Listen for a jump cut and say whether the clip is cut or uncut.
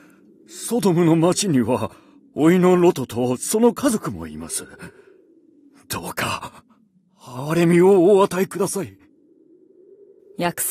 uncut